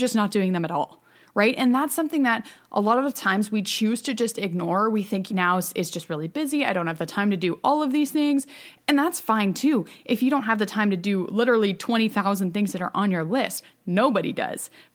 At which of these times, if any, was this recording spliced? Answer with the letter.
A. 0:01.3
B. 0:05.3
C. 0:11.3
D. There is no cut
B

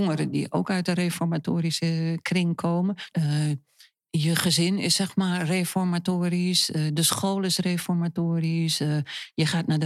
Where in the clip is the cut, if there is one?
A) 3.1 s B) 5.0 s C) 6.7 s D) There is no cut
A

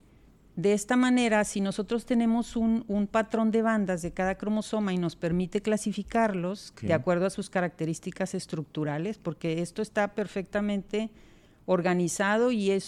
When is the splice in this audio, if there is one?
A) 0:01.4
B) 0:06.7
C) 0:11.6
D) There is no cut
B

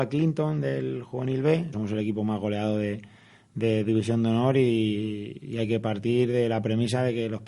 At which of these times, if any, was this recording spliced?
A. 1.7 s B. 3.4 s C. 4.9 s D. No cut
A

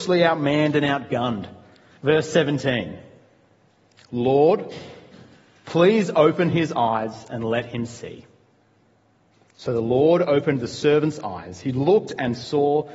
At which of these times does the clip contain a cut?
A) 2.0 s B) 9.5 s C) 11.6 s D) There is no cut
A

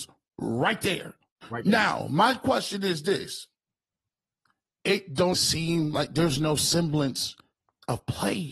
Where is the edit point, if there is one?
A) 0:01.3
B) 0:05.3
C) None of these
B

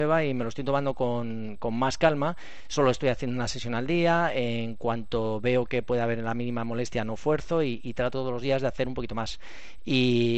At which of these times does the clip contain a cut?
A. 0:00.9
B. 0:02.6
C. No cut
C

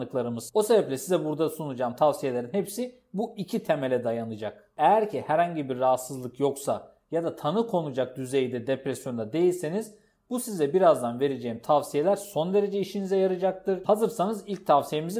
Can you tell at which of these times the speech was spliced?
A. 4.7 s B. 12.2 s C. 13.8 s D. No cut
C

